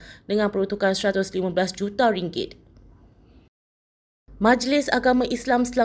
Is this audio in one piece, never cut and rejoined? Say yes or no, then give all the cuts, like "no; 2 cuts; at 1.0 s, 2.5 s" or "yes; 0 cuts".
yes; 0 cuts